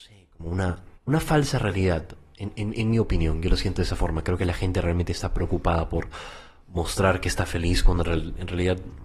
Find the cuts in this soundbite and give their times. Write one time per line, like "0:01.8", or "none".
0:01.0